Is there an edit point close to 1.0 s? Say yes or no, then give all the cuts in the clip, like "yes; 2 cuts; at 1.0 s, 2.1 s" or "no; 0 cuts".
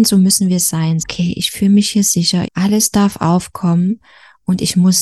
yes; 2 cuts; at 1.0 s, 2.4 s